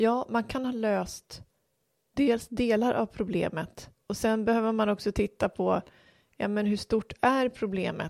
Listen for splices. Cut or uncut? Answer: uncut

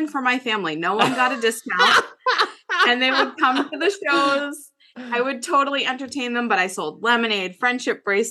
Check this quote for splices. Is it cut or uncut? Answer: uncut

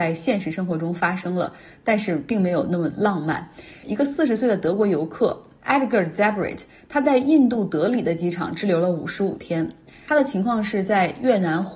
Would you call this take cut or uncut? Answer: uncut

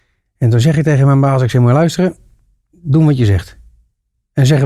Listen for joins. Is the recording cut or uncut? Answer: cut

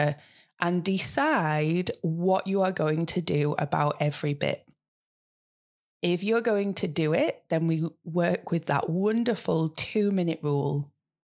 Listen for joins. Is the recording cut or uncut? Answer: uncut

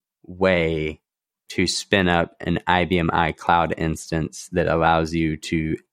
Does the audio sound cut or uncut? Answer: uncut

